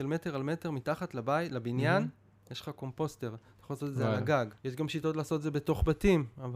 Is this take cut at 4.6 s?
yes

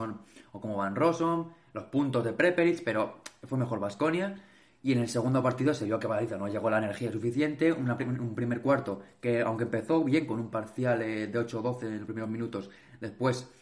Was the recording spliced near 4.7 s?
no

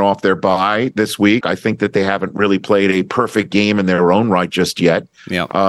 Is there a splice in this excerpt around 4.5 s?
no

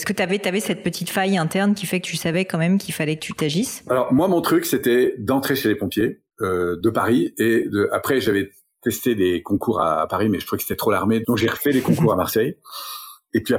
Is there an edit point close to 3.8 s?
no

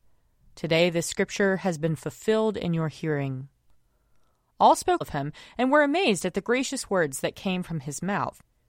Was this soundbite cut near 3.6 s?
no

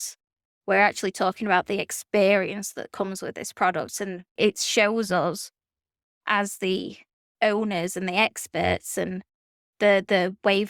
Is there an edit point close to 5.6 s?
no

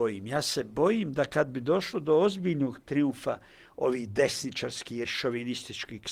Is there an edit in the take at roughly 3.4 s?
no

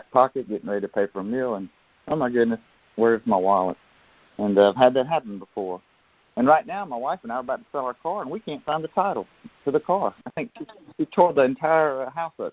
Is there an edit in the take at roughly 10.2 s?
yes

